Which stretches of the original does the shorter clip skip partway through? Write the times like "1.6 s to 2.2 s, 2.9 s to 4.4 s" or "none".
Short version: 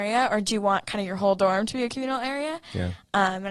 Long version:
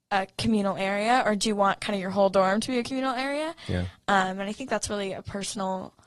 none